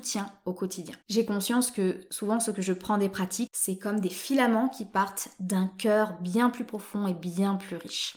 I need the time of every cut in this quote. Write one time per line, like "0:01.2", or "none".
0:01.0
0:03.5

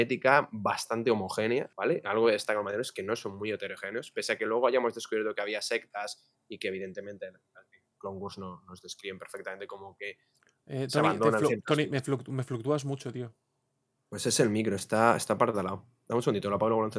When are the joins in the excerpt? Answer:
0:01.7

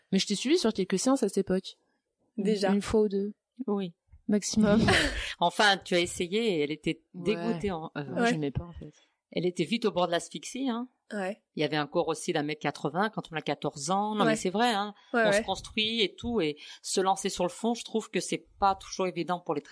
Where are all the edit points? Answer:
none

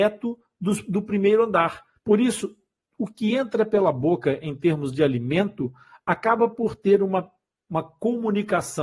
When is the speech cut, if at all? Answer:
0:02.0

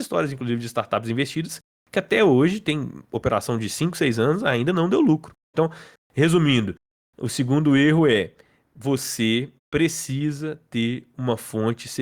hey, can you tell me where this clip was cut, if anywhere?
0:05.5
0:09.6

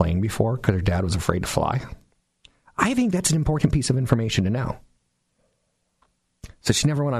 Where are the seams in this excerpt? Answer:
none

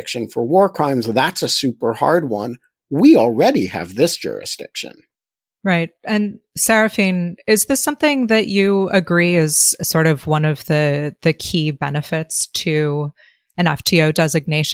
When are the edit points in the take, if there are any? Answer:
none

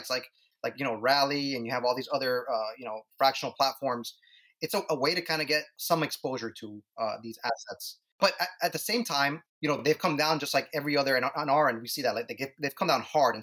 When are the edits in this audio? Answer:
none

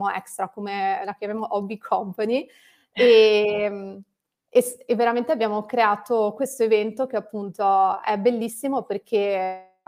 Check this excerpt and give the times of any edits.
none

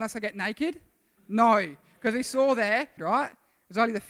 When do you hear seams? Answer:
0:03.0

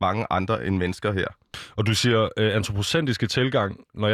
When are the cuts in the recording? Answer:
none

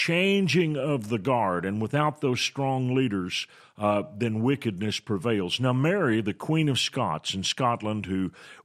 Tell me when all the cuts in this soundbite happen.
none

